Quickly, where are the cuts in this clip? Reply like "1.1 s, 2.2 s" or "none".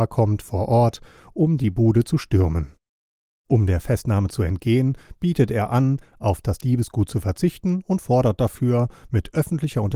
none

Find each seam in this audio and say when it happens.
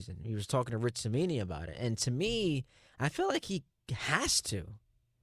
none

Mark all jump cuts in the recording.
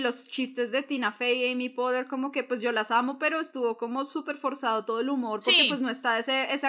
none

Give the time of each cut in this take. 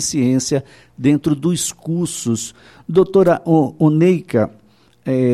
none

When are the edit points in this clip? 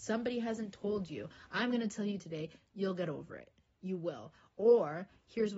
none

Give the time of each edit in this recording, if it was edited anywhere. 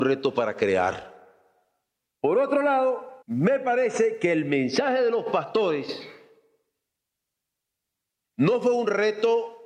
2.1 s, 3.2 s

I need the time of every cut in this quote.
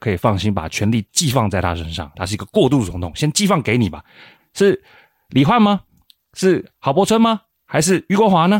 2.1 s, 4.4 s

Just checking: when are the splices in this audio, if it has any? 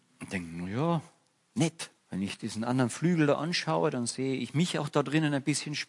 2.0 s

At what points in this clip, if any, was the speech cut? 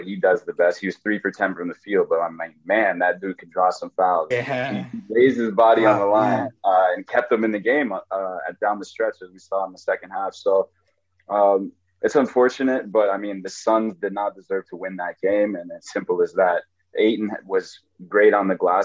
4.3 s

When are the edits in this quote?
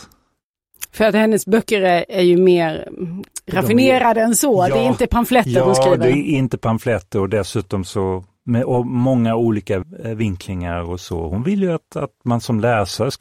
none

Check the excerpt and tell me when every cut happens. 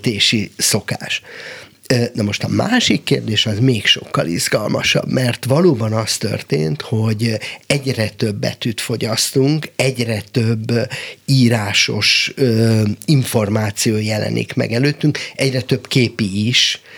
none

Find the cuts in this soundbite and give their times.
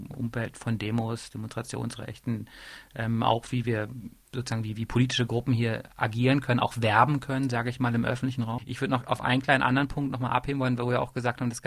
8.6 s

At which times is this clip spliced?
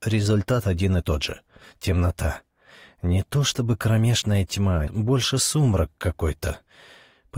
4.9 s

